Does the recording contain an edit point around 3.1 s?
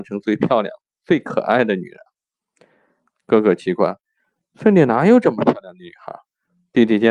yes; 1 cut; at 3.1 s

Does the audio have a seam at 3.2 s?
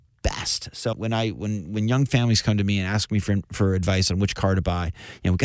no; 1 cut; at 0.9 s

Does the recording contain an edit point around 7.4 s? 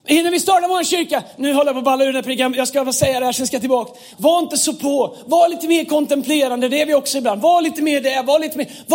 no; 1 cut; at 4.1 s

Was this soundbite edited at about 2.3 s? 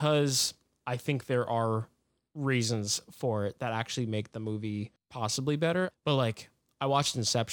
no; 1 cut; at 5.9 s

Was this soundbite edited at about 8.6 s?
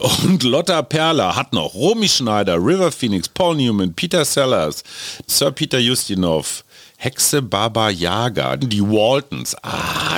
yes; 2 cuts; at 5.3 s, 8.6 s

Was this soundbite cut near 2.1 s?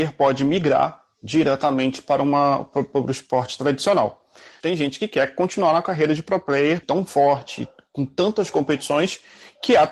no; 2 cuts; at 4.6 s, 6.8 s

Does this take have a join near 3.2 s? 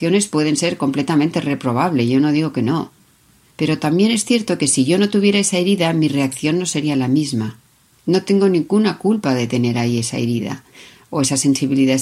no; 1 cut; at 8.0 s

